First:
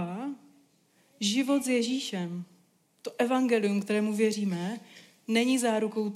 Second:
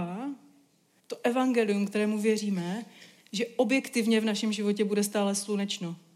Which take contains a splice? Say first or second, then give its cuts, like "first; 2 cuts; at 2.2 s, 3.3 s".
second; 2 cuts; at 1.0 s, 3.2 s